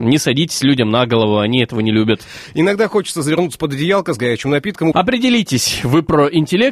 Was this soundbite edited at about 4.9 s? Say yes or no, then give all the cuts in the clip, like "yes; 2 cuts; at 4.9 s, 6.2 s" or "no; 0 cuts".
yes; 1 cut; at 4.9 s